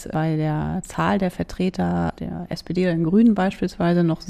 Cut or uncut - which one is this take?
uncut